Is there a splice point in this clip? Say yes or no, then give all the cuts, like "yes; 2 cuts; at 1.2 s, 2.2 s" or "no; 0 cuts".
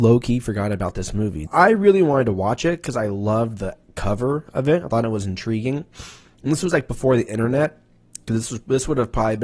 yes; 1 cut; at 1.5 s